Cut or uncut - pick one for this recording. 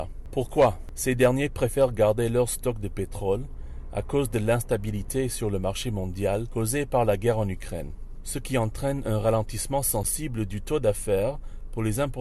uncut